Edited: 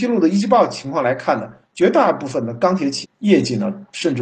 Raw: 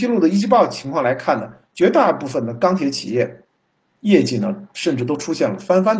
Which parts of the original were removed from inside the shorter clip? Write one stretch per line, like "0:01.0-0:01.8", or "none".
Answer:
0:03.0-0:03.9

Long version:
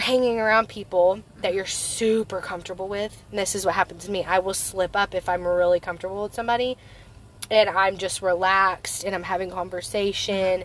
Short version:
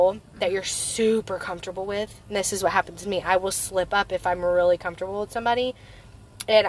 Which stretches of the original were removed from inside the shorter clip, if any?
none

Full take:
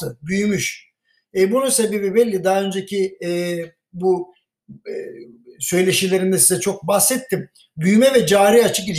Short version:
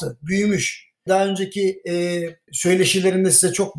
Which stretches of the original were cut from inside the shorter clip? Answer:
0:01.1-0:02.4
0:03.8-0:05.6

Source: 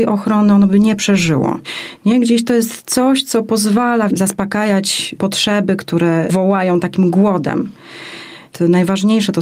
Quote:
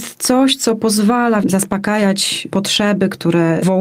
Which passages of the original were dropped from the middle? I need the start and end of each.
none

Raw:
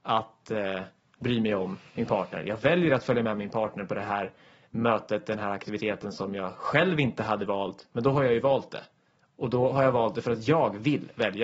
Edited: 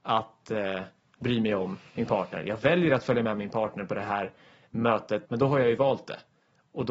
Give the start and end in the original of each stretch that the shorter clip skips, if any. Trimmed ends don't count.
0:05.2-0:07.9

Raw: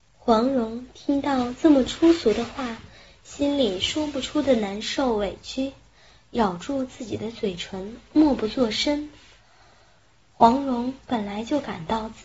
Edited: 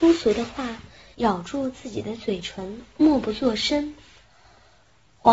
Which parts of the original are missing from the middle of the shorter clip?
0:03.1-0:06.3

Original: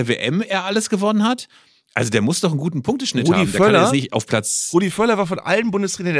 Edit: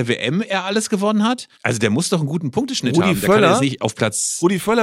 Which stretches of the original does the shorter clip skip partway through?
0:01.5-0:01.9

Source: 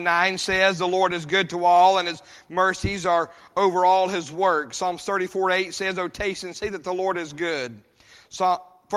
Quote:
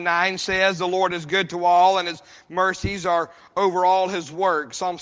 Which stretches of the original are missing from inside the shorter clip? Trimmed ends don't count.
none

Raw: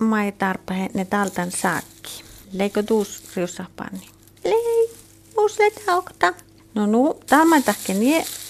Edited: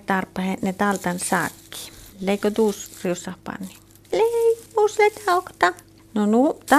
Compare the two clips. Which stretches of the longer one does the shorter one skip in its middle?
0:05.0-0:05.3

